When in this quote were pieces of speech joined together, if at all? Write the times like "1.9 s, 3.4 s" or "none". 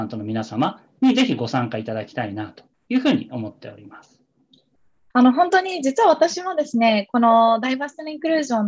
5.1 s